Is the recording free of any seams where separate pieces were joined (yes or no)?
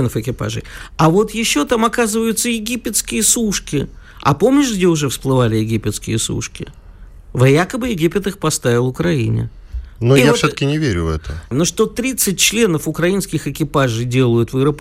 no